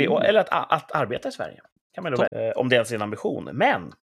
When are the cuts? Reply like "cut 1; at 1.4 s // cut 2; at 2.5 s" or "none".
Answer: cut 1; at 2.3 s